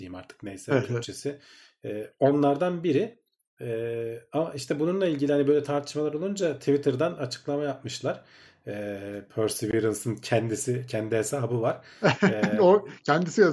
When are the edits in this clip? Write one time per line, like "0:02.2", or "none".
none